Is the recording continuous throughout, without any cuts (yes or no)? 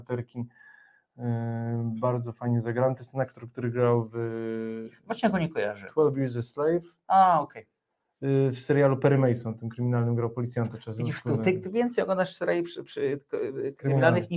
yes